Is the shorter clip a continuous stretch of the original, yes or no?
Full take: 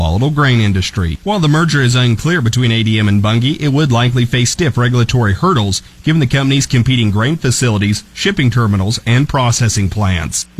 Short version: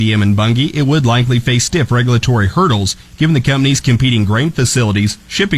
yes